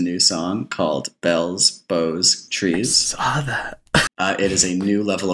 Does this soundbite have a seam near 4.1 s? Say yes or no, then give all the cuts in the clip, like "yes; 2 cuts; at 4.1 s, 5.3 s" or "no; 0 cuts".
yes; 2 cuts; at 2.5 s, 4.1 s